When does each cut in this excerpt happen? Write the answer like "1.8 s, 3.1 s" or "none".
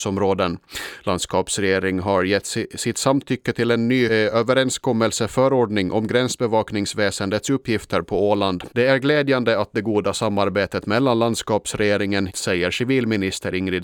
4.1 s, 8.7 s, 12.3 s